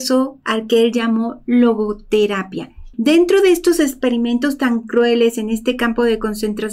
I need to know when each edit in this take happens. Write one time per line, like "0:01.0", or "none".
0:02.9